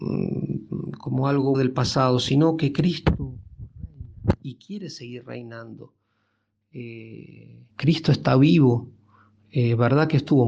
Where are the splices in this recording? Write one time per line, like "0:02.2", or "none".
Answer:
0:01.5
0:07.7